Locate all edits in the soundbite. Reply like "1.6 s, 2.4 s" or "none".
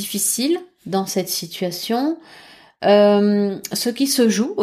none